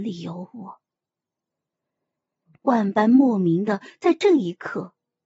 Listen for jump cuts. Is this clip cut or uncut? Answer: cut